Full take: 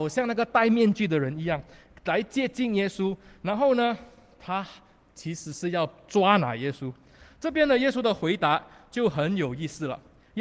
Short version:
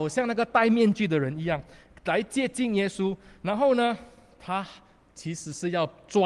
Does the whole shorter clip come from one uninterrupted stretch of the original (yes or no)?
yes